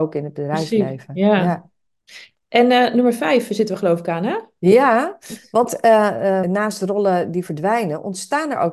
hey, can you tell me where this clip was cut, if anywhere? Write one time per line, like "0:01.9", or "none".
0:06.4